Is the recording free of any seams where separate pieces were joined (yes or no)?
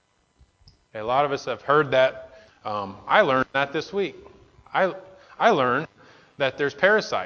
no